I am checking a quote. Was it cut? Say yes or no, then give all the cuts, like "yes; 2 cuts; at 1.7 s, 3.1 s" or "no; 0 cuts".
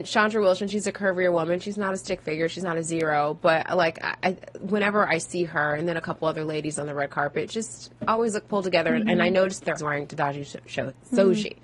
yes; 1 cut; at 9.8 s